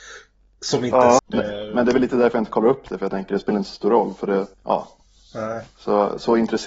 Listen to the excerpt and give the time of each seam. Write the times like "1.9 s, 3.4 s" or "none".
1.2 s, 4.5 s